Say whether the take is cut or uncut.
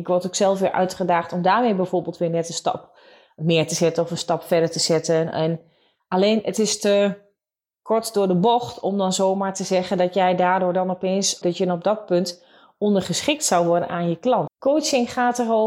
cut